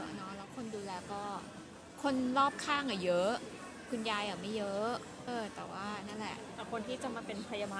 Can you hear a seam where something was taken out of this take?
yes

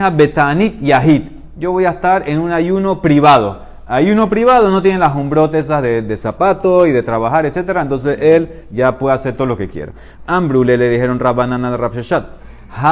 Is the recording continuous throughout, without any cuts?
yes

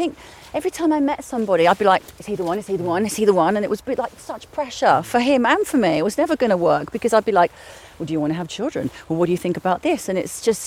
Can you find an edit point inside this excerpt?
no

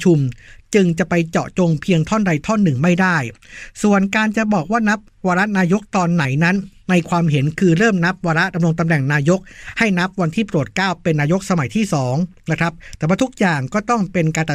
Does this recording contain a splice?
no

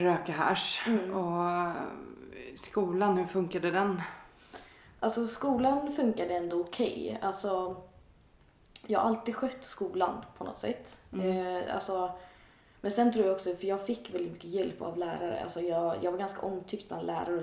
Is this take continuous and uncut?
yes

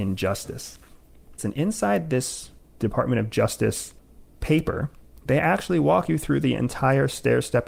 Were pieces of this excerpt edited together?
yes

